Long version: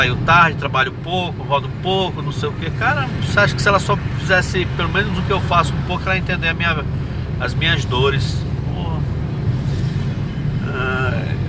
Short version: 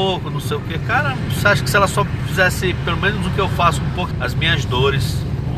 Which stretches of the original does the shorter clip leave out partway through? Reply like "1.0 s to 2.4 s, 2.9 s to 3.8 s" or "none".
6.0 s to 7.3 s